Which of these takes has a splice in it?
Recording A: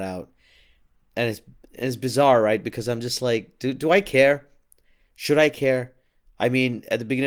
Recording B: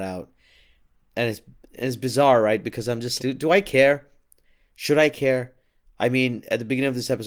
B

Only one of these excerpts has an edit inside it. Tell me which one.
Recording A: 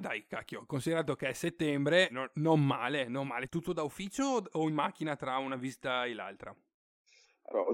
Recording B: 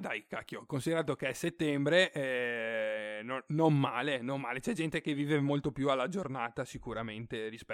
A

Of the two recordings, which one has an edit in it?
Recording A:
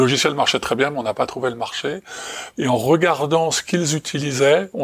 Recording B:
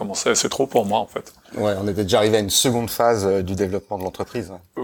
A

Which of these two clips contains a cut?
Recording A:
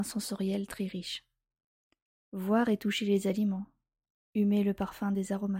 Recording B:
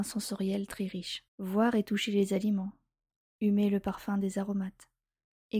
B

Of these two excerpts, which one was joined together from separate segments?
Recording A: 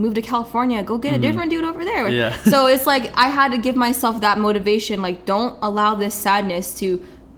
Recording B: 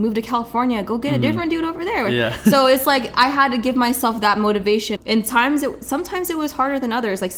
B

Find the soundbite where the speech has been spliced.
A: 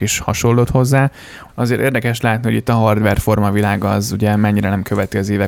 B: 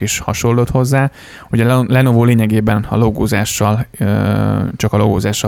A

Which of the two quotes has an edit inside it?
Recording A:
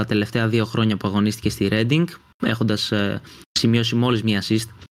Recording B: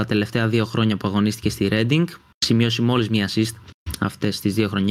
B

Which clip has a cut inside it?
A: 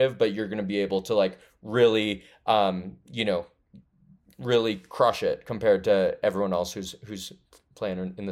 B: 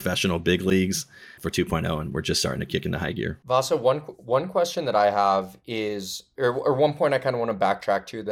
B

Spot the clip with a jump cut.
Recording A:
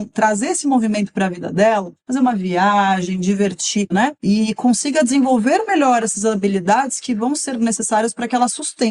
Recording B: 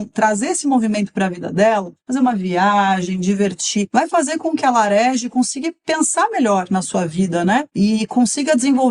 A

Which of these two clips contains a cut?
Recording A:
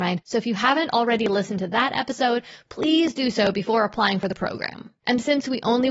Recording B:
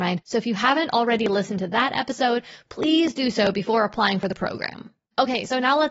A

